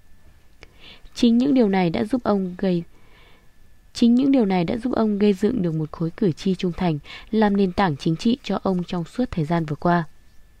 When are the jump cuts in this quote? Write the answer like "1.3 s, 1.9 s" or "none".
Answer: none